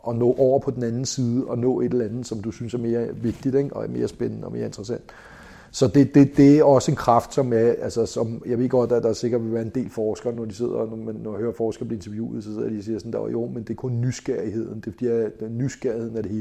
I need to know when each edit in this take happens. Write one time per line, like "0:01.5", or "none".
none